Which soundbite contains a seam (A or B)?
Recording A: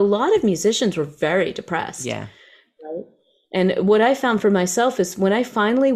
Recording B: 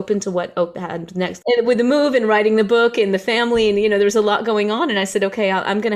B